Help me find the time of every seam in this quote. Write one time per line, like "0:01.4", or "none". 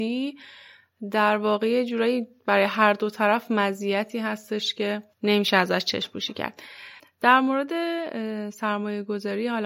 0:05.1